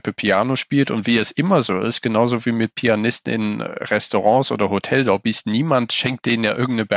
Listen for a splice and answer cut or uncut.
uncut